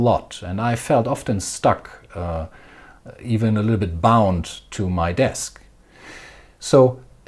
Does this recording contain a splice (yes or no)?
no